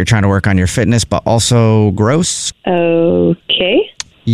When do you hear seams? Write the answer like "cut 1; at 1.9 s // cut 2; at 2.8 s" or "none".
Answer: cut 1; at 2.5 s